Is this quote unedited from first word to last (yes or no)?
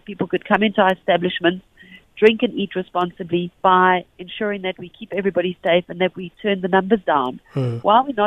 no